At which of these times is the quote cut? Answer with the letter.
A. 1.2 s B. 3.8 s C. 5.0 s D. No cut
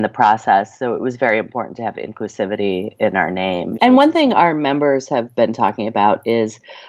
B